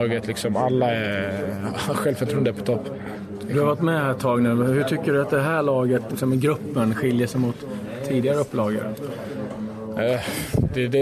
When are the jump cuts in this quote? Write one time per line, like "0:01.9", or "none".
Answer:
0:06.1